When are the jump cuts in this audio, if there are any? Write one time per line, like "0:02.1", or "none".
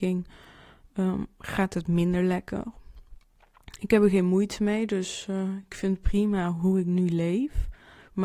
none